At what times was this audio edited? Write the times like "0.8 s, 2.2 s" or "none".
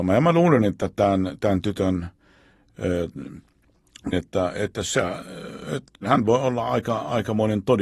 4.1 s, 6.0 s

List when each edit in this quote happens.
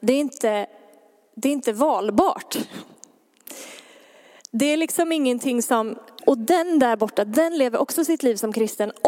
6.2 s

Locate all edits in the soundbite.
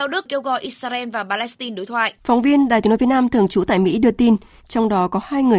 2.2 s, 4.6 s

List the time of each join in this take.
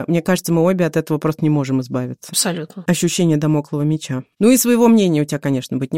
none

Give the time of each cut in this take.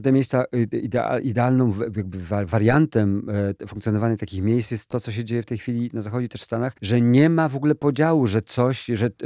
6.8 s

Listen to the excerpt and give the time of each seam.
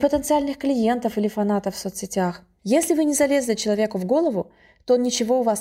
2.6 s

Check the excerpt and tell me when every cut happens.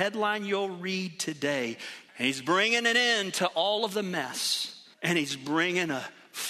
2.1 s, 4.9 s

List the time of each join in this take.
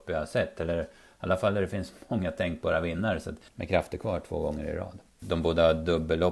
3.5 s, 5.2 s

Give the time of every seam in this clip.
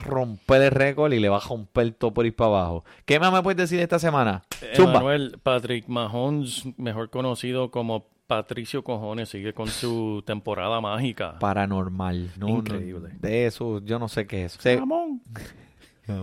12.4 s, 14.6 s

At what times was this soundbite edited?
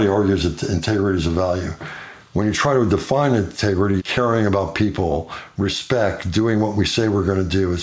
4.0 s

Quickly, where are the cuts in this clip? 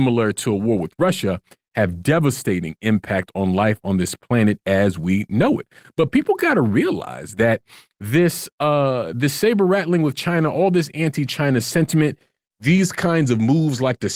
none

